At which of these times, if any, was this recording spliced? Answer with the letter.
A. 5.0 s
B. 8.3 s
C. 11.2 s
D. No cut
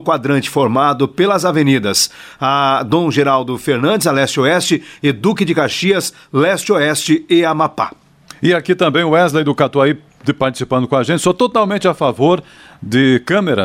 D